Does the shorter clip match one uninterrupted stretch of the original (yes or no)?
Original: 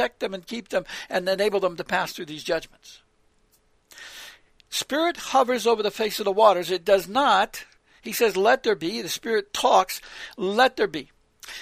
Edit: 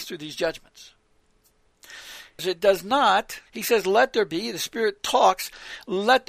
no